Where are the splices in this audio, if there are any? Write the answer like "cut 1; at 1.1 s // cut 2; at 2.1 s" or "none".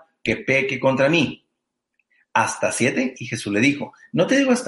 none